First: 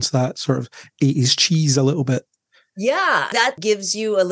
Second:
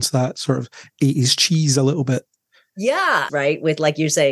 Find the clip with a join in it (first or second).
second